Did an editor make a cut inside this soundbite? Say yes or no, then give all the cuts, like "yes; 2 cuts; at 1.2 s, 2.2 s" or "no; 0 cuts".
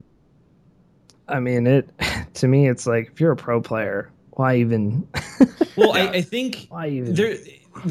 no; 0 cuts